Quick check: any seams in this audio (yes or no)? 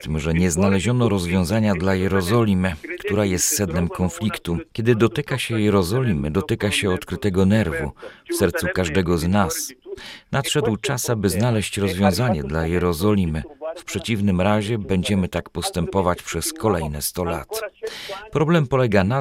no